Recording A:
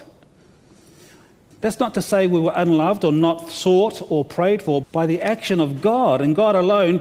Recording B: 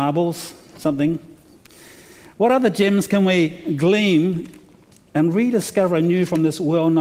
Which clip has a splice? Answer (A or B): A